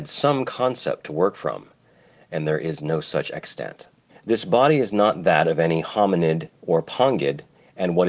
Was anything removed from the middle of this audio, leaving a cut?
yes; 1 cut; at 4.1 s

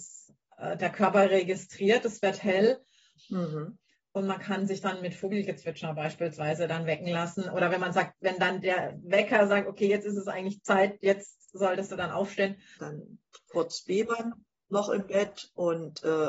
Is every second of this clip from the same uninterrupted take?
no; 2 cuts; at 3.2 s, 12.8 s

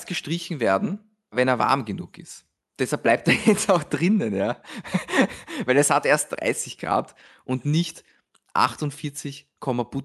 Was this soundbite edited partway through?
no; 0 cuts

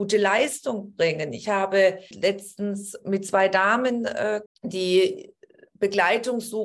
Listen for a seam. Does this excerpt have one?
yes; 2 cuts; at 2.1 s, 4.5 s

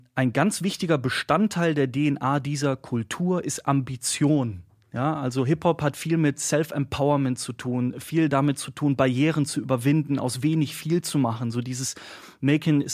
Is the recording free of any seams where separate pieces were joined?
yes; 0 cuts

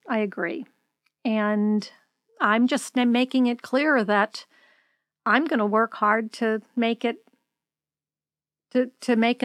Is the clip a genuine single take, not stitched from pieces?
yes; 0 cuts

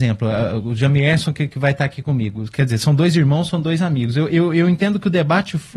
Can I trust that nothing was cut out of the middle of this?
yes; 0 cuts

